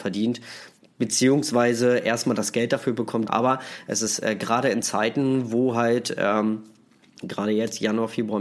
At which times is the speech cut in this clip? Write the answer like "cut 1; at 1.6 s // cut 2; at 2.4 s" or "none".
cut 1; at 3.3 s

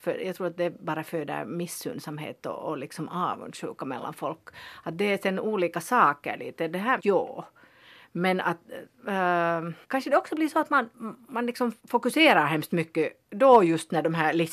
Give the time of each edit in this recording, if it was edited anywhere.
cut 1; at 7.0 s // cut 2; at 9.8 s // cut 3; at 11.8 s

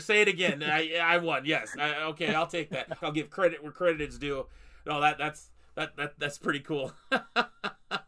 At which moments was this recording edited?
cut 1; at 3.0 s

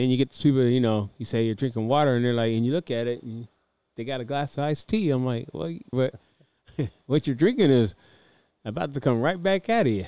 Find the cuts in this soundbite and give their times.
cut 1; at 5.9 s

